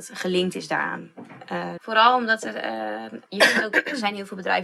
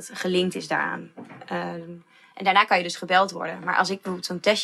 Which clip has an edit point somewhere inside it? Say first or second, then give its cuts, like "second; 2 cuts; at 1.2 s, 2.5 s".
first; 2 cuts; at 1.8 s, 3.3 s